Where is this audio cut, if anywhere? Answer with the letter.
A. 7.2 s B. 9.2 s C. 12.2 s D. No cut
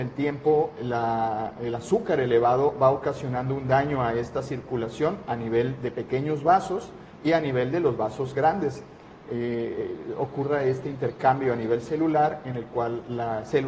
B